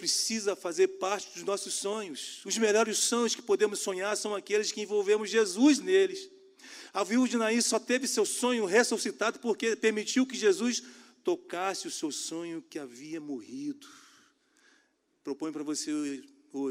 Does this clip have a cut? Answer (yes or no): no